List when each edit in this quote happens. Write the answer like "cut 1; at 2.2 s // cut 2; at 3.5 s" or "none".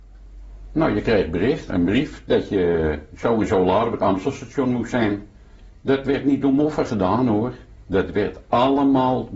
cut 1; at 1.7 s